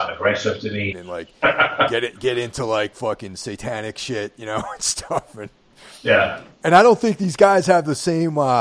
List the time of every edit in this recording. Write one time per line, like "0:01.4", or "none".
0:00.9